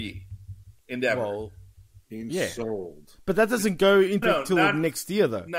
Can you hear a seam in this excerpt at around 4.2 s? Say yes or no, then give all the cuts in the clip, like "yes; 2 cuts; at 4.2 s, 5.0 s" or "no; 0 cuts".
yes; 1 cut; at 4.2 s